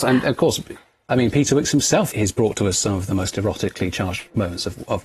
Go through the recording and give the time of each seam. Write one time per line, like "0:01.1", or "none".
0:02.1